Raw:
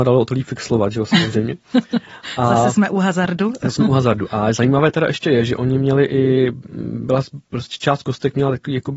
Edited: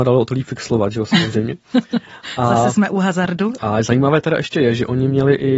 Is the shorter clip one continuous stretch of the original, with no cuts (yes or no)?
no